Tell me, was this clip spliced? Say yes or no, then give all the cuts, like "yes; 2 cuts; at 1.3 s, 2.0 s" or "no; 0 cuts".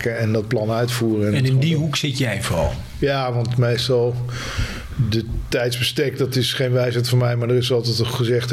no; 0 cuts